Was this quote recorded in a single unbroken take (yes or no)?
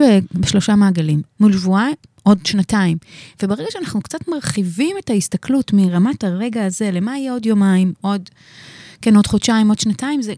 no